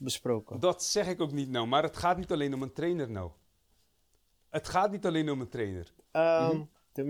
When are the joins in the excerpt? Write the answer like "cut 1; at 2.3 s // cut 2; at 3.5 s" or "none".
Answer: cut 1; at 6.0 s